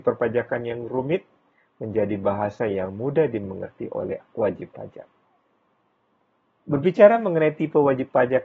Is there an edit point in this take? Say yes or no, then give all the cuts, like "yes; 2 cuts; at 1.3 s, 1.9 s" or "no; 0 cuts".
no; 0 cuts